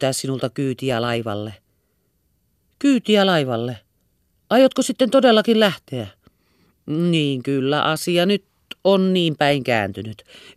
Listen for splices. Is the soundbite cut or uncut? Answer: uncut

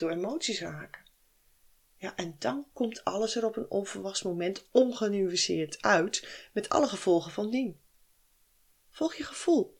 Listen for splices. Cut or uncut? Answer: uncut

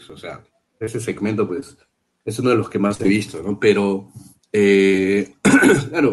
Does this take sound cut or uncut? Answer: uncut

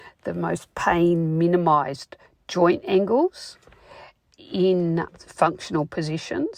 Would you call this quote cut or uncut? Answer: cut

